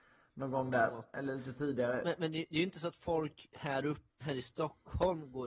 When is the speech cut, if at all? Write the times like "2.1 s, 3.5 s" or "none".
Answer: 4.1 s